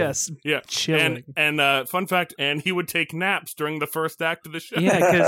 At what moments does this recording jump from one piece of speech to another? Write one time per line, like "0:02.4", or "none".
0:02.3